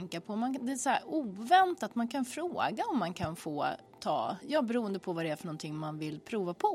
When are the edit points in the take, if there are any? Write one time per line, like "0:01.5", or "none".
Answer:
0:04.4